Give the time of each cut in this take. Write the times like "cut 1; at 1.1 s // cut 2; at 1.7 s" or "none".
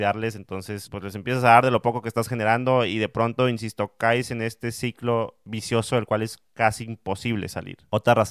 none